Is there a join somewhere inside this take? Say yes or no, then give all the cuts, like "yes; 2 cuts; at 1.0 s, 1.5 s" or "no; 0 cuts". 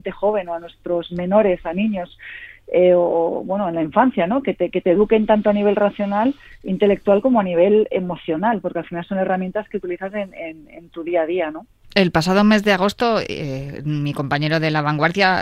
no; 0 cuts